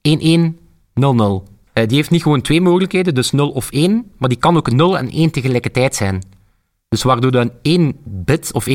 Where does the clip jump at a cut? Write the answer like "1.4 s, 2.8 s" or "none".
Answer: 1.7 s